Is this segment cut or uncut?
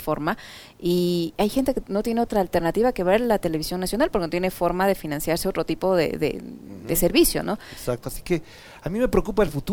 cut